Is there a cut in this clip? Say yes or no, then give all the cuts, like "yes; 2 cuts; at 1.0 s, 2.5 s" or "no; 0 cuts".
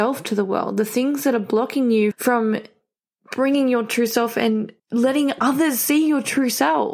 yes; 2 cuts; at 2.1 s, 4.8 s